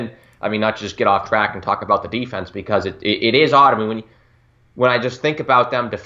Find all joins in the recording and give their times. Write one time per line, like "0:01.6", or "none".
none